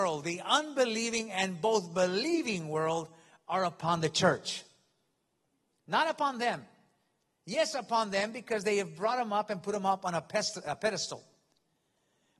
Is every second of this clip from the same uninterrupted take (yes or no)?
yes